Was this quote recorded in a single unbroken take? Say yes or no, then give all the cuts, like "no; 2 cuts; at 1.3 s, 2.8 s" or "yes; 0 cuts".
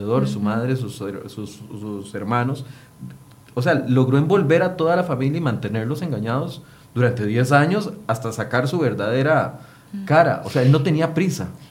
yes; 0 cuts